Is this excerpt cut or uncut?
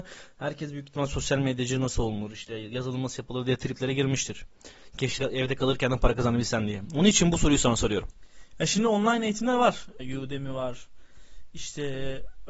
cut